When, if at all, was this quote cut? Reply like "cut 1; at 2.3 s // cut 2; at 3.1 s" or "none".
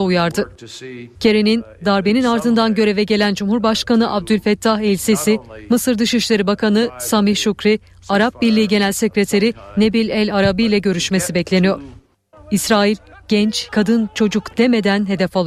cut 1; at 1.1 s // cut 2; at 12.3 s // cut 3; at 13.7 s